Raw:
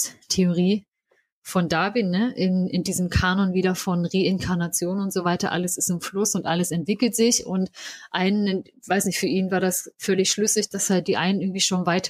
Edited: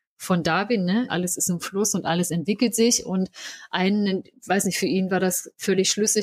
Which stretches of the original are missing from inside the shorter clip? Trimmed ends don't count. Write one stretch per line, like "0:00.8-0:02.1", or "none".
0:02.3-0:05.5